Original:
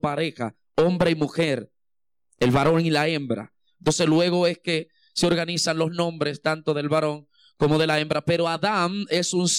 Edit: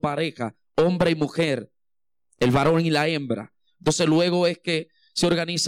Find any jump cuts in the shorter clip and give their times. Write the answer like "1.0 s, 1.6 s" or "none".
none